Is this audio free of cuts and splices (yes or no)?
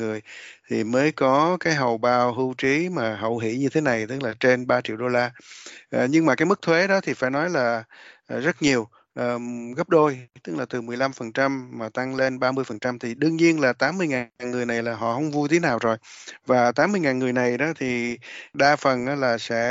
yes